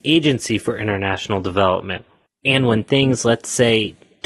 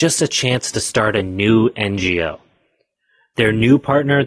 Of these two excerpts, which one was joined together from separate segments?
first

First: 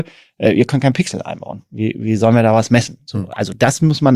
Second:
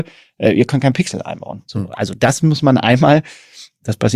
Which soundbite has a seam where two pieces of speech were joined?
second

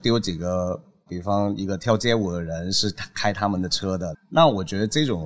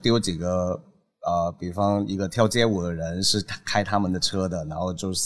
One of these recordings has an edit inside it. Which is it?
first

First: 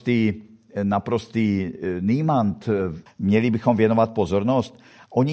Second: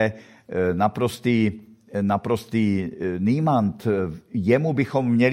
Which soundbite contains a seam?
first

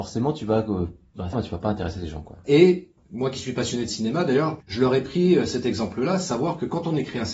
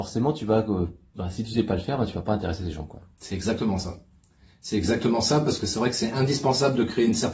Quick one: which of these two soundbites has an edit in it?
first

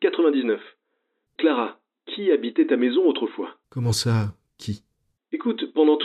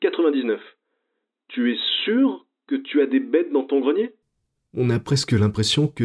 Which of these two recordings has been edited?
first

